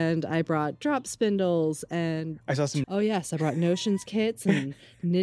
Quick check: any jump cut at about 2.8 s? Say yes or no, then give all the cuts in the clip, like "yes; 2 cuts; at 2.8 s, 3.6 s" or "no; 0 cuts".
yes; 1 cut; at 2.8 s